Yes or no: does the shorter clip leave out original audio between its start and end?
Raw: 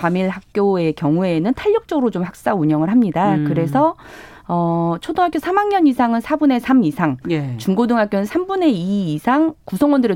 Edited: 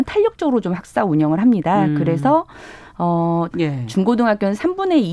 yes